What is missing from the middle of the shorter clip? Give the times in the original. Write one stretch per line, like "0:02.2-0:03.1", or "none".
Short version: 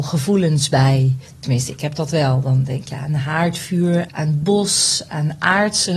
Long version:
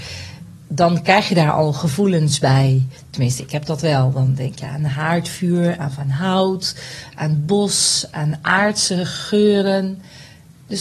0:05.8-0:07.1